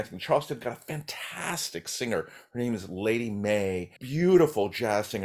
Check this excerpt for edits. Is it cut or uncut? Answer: cut